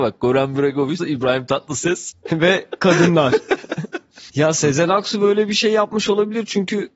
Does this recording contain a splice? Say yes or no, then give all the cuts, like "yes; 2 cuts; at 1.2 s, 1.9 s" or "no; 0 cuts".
yes; 2 cuts; at 1.0 s, 4.3 s